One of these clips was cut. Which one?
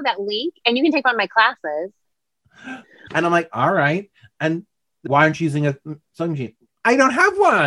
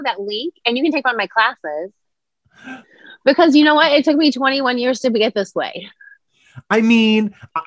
first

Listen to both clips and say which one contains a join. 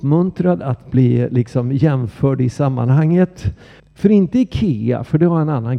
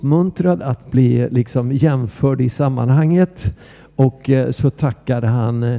first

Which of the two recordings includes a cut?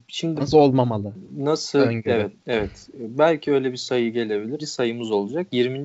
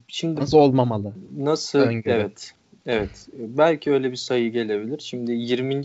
first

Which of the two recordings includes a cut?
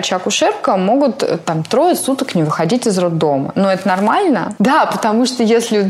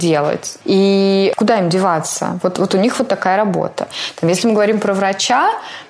first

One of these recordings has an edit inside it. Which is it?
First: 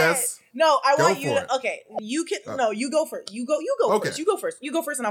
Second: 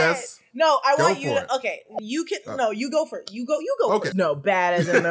second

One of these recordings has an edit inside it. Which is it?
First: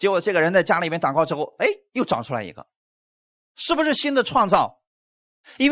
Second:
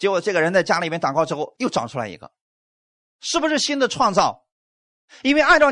second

